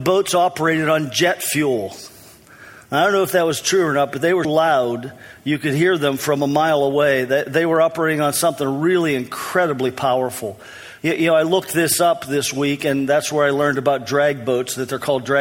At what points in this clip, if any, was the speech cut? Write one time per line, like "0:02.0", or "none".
0:04.4